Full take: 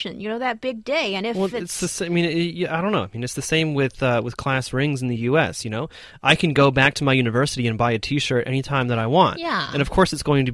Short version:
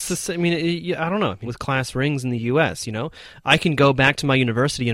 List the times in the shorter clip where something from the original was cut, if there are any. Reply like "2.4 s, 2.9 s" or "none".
1.5 s